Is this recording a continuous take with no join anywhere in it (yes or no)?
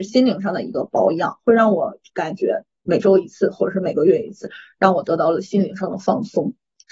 yes